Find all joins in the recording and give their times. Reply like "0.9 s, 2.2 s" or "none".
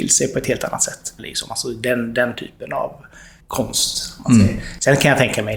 1.2 s, 3.4 s